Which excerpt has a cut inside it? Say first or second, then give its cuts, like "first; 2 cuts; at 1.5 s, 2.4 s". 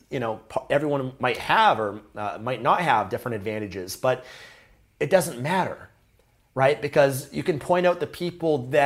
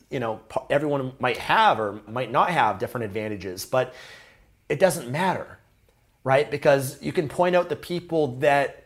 second; 1 cut; at 2.1 s